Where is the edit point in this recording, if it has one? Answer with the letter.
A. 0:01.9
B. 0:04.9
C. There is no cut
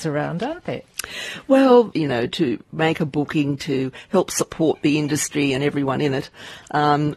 A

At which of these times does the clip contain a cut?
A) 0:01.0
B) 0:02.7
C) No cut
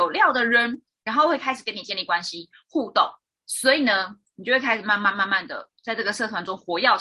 C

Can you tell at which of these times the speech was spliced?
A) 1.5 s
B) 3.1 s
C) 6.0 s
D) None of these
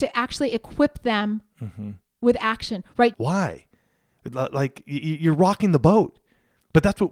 B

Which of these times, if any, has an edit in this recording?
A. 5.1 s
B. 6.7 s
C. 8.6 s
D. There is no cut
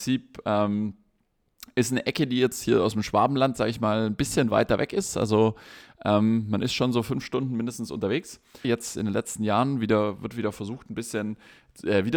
C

